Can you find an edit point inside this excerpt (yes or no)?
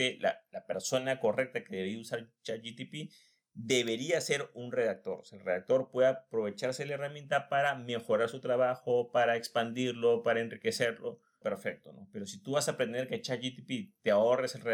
yes